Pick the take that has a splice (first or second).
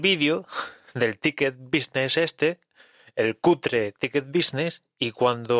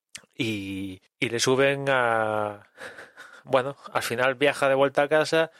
second